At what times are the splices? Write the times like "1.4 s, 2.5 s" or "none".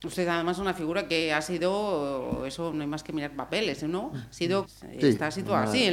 4.6 s